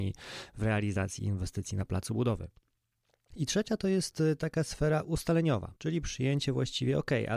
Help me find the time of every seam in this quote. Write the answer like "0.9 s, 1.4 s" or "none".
3.3 s, 5.8 s